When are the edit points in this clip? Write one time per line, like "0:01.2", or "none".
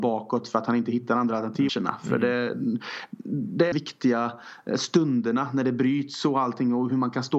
0:01.7
0:03.7